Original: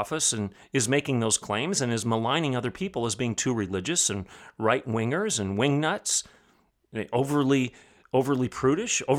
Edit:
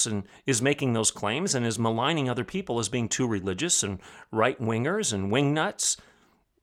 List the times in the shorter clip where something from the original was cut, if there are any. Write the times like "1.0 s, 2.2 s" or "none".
none